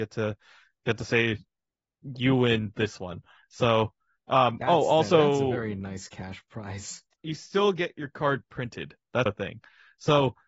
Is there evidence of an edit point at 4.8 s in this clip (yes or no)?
no